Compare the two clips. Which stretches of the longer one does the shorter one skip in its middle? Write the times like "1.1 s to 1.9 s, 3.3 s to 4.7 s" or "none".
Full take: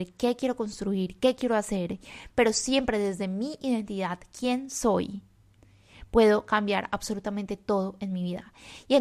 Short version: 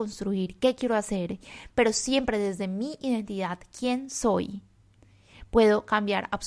none